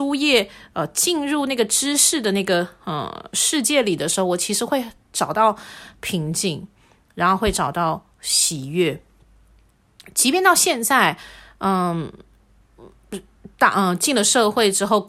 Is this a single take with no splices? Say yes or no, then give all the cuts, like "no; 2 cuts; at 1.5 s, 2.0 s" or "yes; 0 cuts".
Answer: yes; 0 cuts